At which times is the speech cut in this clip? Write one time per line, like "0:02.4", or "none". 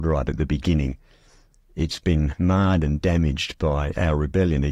none